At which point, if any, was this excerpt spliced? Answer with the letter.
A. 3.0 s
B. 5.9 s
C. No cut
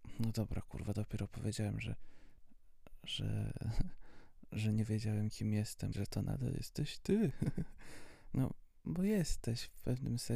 B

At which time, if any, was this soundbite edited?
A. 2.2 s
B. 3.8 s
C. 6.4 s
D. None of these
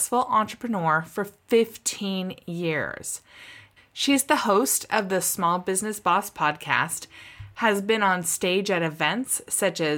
B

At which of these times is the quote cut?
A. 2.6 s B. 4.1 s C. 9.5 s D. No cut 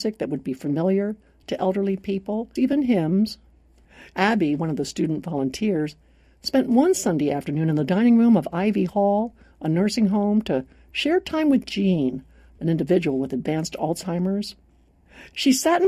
A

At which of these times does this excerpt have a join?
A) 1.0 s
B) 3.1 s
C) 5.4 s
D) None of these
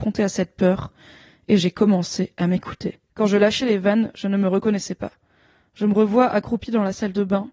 B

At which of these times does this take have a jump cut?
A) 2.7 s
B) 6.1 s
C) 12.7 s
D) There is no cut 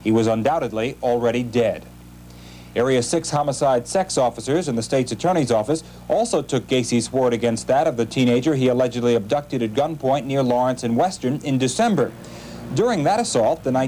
D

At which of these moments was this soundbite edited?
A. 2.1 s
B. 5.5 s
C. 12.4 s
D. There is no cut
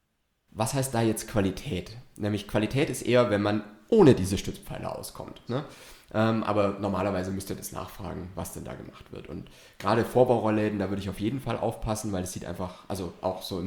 B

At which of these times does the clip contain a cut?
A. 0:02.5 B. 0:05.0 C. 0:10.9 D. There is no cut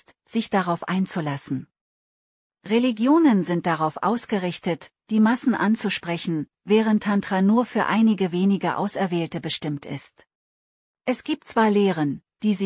C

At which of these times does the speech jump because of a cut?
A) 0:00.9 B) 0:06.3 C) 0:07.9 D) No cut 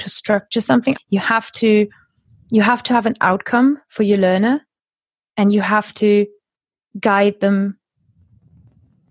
A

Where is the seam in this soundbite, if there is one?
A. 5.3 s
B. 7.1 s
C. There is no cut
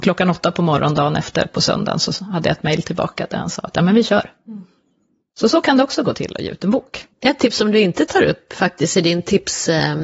B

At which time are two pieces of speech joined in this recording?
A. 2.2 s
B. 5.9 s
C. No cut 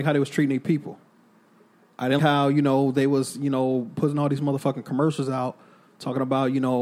A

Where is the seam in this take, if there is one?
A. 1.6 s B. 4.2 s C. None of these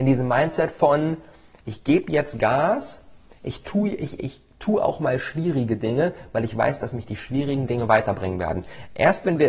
B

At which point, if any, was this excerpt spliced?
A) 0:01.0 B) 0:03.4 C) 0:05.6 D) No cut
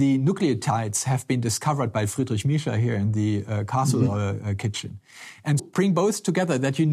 C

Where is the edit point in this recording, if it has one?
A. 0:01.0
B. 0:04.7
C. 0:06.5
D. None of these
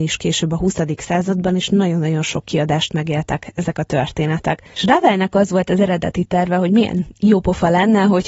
B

